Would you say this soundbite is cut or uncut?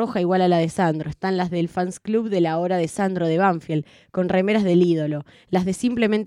uncut